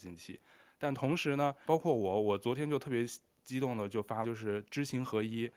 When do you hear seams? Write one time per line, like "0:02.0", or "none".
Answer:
0:01.7
0:04.2